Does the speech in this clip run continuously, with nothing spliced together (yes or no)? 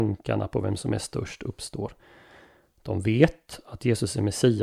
yes